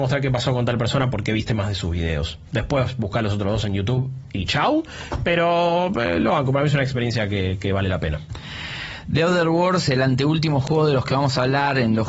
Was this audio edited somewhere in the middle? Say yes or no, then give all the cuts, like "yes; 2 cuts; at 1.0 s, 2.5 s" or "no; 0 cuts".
no; 0 cuts